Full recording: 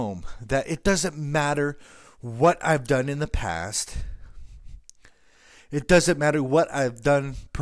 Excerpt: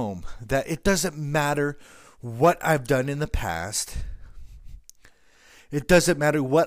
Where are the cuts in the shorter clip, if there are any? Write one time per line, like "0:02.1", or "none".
none